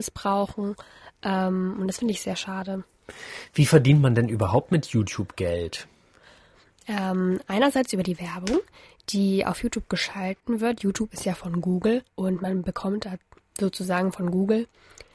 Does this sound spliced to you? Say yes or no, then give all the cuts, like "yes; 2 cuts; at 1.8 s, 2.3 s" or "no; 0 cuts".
yes; 1 cut; at 12.1 s